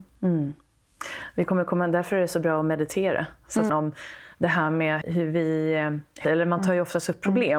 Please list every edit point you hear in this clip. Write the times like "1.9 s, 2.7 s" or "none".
3.7 s, 5.0 s, 6.2 s